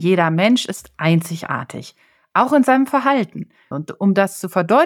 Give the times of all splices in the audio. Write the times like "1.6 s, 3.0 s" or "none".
3.7 s